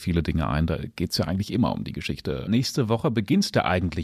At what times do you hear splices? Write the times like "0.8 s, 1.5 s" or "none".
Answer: 2.5 s